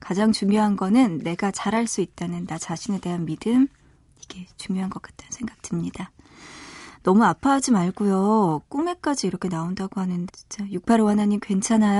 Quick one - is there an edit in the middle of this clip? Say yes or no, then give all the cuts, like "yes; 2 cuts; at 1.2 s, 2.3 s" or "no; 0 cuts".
yes; 1 cut; at 10.3 s